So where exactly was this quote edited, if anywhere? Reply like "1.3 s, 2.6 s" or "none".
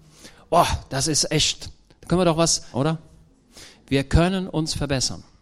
2.7 s